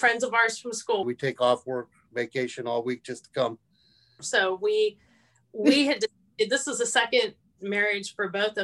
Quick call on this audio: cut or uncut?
cut